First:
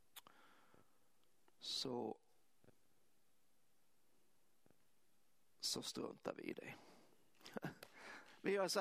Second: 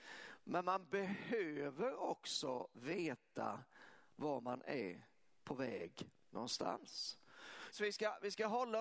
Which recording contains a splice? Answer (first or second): second